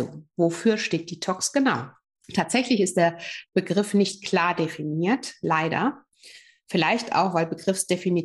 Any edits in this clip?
no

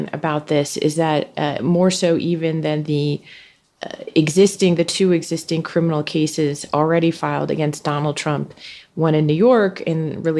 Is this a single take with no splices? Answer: yes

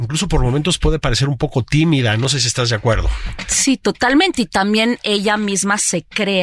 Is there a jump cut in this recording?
no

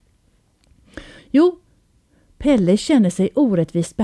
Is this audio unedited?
no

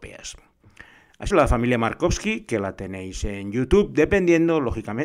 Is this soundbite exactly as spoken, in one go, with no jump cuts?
no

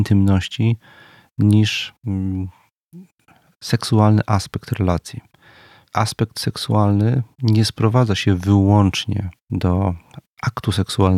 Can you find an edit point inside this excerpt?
yes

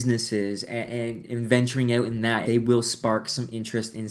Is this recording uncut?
no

